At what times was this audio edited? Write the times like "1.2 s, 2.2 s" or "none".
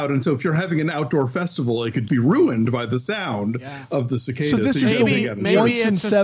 2.1 s